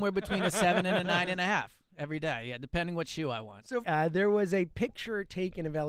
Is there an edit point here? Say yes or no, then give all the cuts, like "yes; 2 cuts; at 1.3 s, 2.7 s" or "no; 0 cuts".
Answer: yes; 1 cut; at 3.8 s